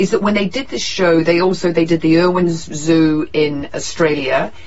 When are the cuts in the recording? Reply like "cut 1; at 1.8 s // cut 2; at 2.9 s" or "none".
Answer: cut 1; at 3.7 s